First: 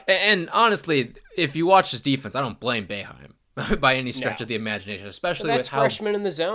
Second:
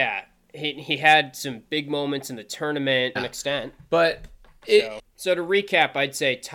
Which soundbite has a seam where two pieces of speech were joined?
second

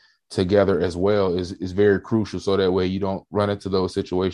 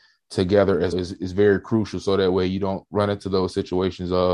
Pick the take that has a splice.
second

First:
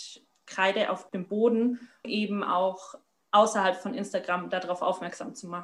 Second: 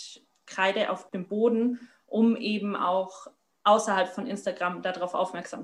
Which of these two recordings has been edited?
first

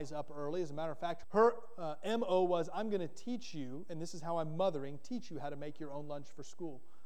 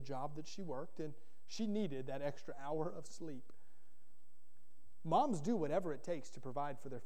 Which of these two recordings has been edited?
first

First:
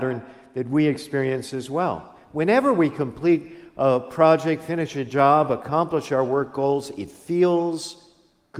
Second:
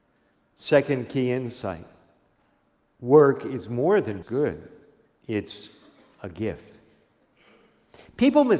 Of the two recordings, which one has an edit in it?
second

